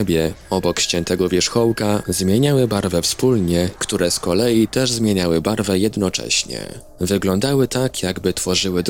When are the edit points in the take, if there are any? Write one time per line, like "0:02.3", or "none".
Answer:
0:03.8